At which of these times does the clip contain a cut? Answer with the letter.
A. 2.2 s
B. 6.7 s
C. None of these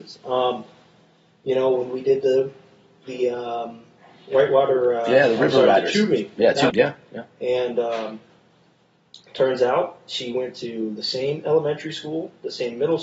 B